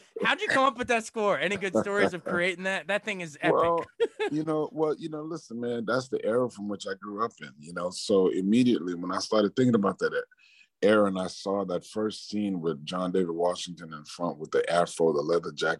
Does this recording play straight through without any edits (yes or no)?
yes